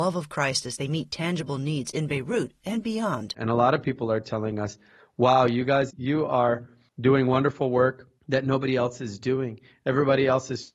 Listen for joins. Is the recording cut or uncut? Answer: cut